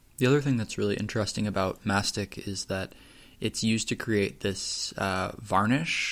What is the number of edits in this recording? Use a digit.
0